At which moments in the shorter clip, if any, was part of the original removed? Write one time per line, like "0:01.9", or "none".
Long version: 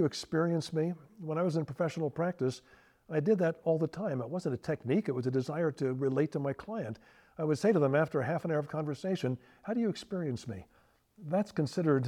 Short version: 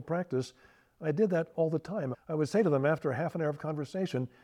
0:02.1